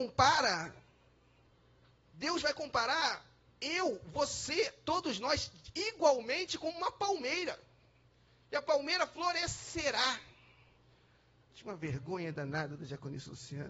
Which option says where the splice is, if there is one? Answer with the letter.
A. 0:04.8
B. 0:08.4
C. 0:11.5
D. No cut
C